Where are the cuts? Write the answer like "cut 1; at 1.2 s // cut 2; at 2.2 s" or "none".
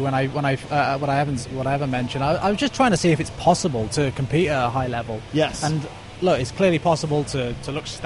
none